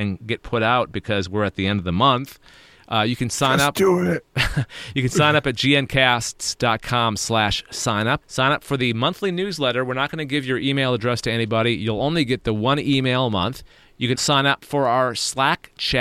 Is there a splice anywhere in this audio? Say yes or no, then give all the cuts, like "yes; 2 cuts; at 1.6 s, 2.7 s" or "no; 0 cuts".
yes; 2 cuts; at 8.2 s, 14.1 s